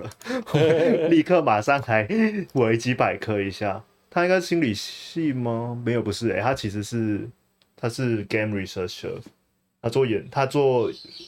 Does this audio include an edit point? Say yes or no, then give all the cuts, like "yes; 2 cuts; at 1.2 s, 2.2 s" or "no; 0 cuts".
no; 0 cuts